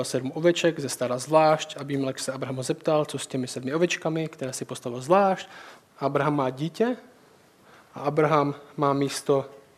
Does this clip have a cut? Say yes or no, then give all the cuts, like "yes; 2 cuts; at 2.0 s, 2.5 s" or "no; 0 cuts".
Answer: yes; 1 cut; at 5.8 s